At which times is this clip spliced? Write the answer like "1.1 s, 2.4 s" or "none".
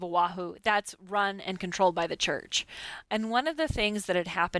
3.0 s